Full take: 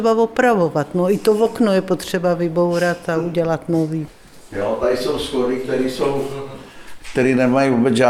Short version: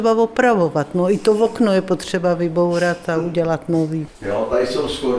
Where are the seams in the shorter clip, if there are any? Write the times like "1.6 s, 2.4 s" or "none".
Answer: 4.1 s